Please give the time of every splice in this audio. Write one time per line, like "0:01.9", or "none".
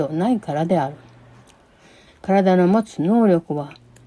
0:02.1